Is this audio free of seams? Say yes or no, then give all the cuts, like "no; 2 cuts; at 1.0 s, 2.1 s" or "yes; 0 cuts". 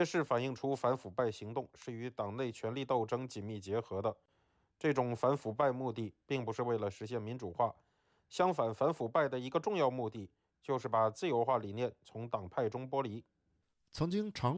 yes; 0 cuts